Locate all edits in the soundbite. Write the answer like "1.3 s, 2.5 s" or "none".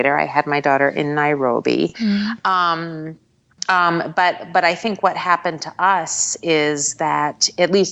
none